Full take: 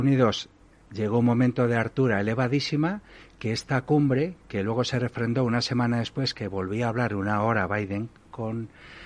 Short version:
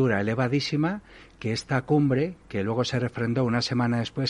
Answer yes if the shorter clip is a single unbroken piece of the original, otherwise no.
yes